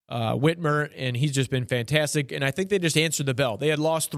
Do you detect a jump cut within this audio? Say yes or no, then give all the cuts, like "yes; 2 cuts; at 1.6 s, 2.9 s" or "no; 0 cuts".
yes; 1 cut; at 2.3 s